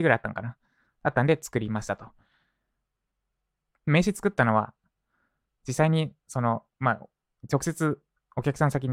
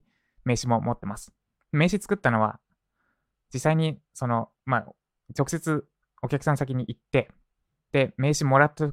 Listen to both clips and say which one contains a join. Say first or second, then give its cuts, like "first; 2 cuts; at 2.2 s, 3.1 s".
first; 1 cut; at 3.7 s